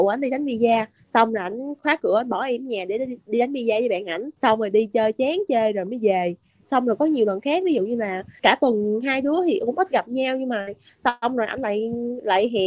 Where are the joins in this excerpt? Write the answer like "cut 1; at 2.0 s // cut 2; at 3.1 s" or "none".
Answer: cut 1; at 4.4 s